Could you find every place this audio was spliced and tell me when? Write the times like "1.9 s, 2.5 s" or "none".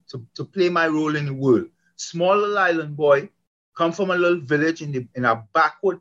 none